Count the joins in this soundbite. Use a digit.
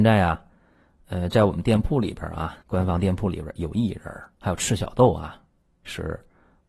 2